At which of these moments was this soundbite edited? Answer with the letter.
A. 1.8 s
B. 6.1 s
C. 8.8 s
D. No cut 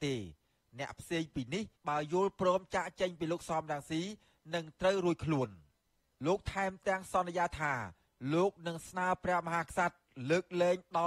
A